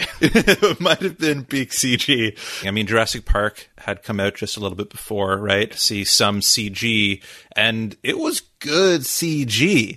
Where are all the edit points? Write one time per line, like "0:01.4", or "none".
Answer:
0:02.6
0:05.7